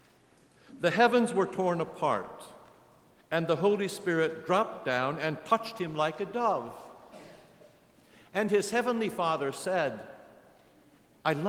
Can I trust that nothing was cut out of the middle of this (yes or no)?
yes